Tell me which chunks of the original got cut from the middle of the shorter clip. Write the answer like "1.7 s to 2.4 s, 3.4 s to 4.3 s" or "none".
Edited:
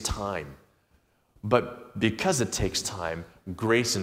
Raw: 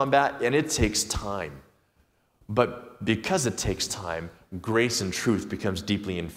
none